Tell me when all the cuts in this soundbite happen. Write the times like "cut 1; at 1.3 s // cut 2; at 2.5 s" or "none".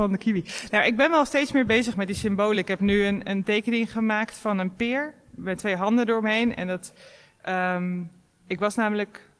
none